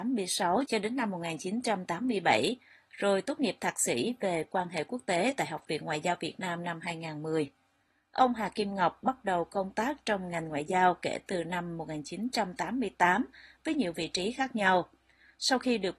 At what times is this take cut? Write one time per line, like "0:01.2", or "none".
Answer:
none